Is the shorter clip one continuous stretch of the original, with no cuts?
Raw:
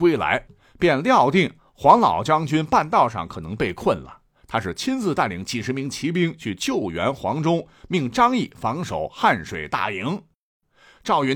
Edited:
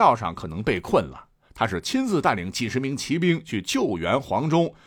yes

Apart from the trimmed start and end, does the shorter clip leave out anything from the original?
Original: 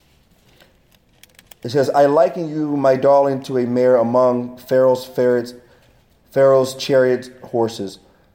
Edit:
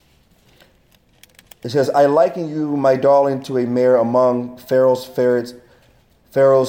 no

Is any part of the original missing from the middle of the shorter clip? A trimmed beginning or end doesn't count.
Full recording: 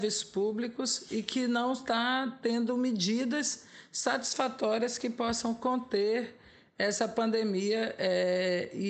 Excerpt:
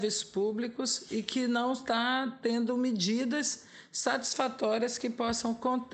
no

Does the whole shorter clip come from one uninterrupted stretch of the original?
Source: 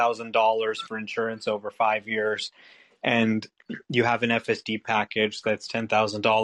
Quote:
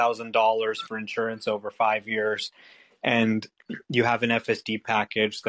yes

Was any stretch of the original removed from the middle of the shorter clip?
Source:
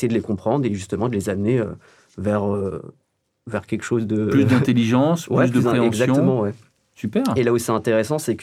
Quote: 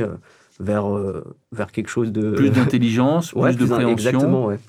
yes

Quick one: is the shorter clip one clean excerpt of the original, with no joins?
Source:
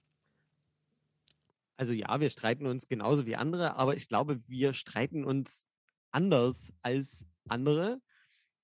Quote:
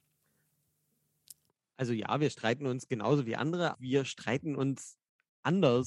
no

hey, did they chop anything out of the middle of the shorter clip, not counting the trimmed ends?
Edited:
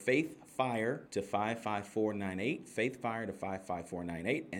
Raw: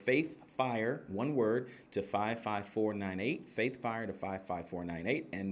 yes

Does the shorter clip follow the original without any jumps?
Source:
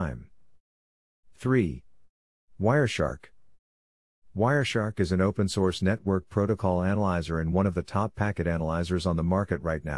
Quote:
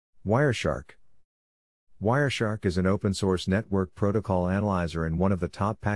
yes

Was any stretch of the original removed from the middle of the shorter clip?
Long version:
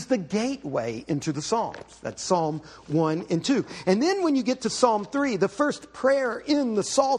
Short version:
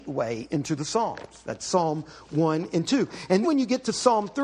yes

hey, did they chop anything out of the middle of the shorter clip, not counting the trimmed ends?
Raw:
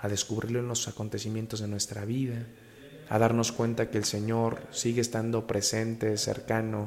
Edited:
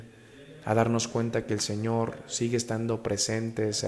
no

